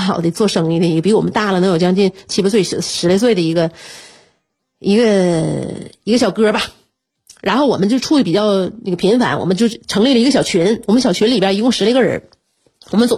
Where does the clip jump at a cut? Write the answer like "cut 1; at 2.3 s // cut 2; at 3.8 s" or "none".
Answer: none

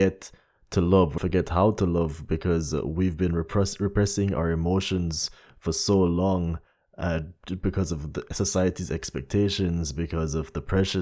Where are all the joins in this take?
cut 1; at 1.2 s

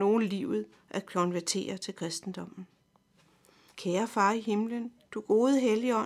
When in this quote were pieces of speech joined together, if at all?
cut 1; at 3.7 s // cut 2; at 5.0 s

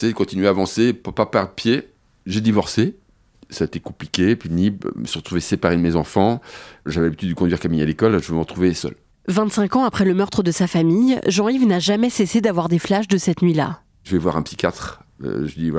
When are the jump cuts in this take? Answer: cut 1; at 13.9 s

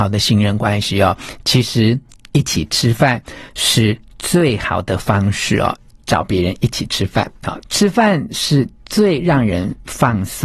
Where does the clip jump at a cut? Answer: cut 1; at 5.9 s // cut 2; at 7.6 s

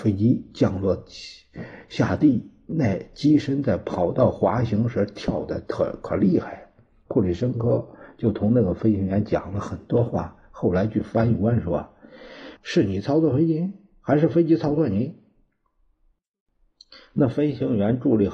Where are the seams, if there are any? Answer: cut 1; at 12.6 s

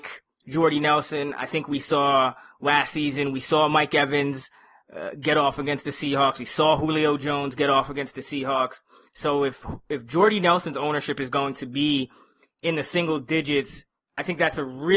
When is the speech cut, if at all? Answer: none

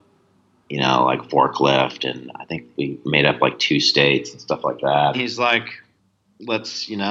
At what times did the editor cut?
cut 1; at 5.1 s

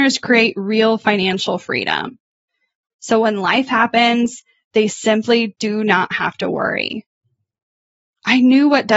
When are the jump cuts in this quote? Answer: none

